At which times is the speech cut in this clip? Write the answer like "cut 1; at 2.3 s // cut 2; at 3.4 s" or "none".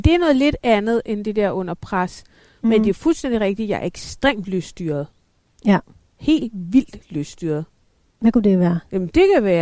none